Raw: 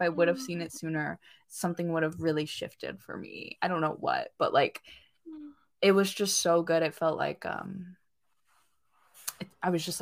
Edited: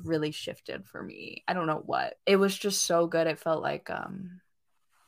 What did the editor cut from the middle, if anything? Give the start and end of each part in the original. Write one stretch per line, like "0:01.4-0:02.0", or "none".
0:04.3-0:05.7